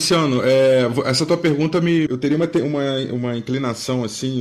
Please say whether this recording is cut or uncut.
cut